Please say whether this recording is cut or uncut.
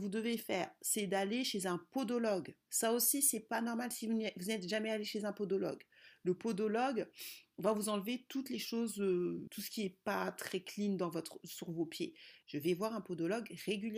cut